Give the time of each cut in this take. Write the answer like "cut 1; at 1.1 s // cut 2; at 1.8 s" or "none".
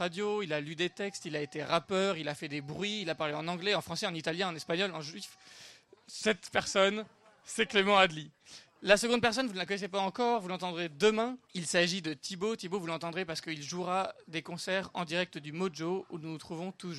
cut 1; at 11.4 s